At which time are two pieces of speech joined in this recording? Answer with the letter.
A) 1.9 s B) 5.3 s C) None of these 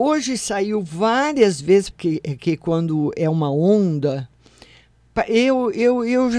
A